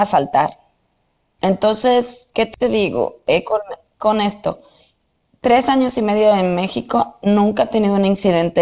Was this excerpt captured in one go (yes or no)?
no